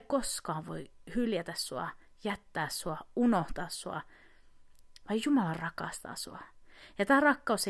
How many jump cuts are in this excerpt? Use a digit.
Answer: 0